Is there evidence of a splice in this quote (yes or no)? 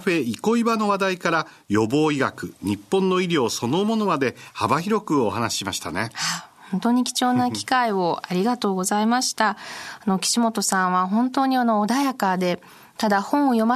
no